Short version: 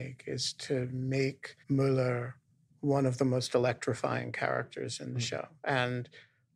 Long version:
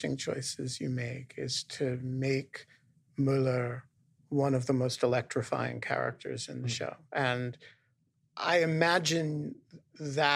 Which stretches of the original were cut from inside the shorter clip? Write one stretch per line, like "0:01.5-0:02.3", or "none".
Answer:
0:02.7-0:03.1

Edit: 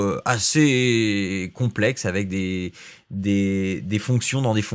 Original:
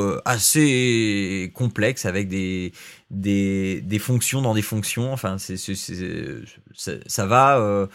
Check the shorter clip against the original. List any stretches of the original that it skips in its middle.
none

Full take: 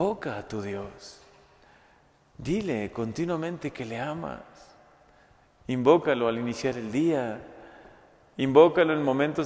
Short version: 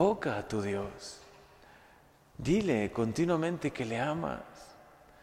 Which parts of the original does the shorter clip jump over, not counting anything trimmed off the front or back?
none

